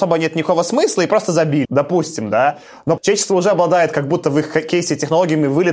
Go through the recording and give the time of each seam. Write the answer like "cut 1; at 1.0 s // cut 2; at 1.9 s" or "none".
cut 1; at 1.6 s // cut 2; at 3.0 s